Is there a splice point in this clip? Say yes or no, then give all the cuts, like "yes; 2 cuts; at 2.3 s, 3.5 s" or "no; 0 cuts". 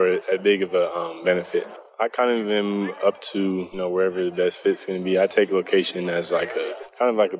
no; 0 cuts